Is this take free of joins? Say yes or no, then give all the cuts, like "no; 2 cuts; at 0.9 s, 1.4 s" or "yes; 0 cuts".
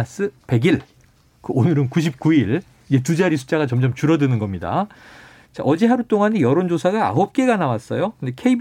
yes; 0 cuts